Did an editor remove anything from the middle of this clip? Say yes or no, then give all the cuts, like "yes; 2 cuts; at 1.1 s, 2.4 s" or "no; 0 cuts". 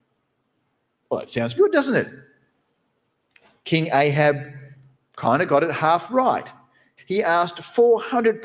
yes; 2 cuts; at 1.6 s, 7.0 s